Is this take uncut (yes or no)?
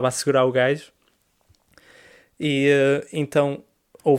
yes